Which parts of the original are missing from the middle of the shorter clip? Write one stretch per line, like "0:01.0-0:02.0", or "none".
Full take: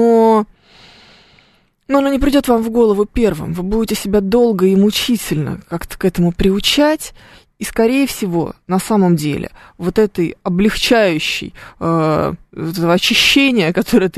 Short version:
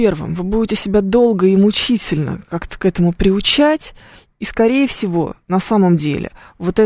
none